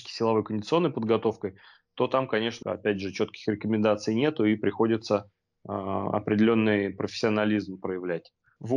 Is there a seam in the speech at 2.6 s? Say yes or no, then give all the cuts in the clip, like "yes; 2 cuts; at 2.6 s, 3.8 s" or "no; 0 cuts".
yes; 1 cut; at 2.6 s